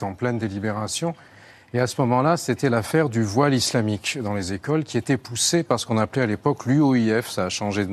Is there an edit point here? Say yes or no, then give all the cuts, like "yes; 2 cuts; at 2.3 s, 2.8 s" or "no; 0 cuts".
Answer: no; 0 cuts